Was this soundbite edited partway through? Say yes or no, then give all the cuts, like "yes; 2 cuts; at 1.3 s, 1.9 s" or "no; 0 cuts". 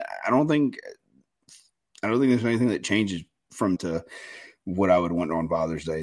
yes; 1 cut; at 3.7 s